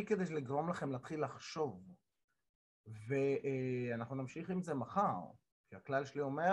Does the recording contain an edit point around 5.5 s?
no; 0 cuts

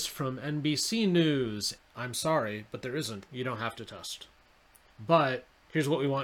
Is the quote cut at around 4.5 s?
no; 2 cuts; at 1.8 s, 3.3 s

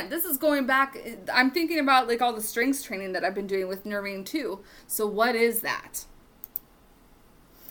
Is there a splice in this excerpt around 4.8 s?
yes; 1 cut; at 4.8 s

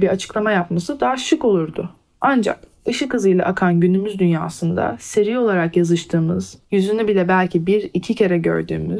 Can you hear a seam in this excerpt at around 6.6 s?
yes; 1 cut; at 6.6 s

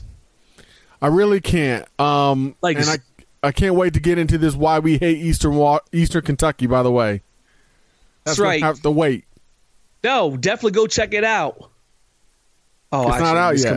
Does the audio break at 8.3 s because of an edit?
yes; 1 cut; at 8.3 s

